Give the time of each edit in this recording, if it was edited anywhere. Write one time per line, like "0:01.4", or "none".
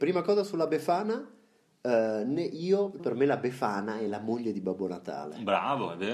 0:03.0